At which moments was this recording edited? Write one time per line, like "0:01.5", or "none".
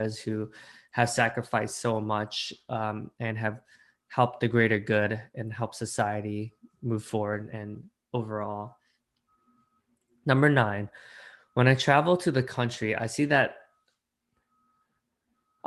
0:07.5